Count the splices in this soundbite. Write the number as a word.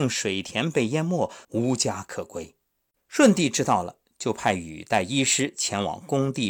two